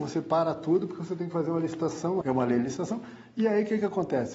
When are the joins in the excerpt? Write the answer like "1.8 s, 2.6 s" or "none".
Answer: 2.2 s